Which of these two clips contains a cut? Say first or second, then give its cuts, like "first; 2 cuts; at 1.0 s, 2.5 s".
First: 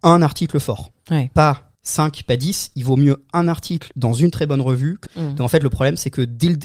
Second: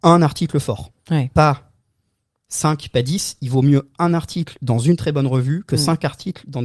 first; 2 cuts; at 1.7 s, 5.1 s